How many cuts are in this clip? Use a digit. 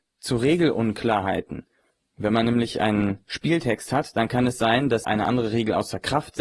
1